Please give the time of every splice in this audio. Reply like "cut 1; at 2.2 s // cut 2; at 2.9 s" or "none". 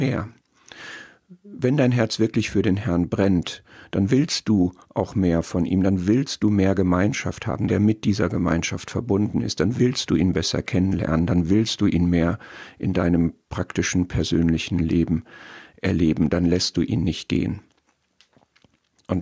cut 1; at 7.7 s